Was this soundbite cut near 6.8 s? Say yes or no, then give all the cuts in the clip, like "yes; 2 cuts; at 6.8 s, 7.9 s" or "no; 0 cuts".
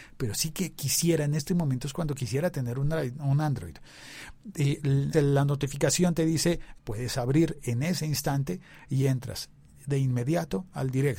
yes; 2 cuts; at 5.1 s, 6.8 s